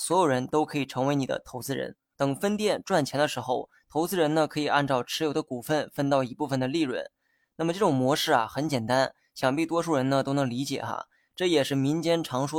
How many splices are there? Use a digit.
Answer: 1